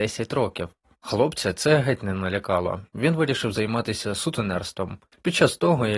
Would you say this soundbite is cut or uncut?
uncut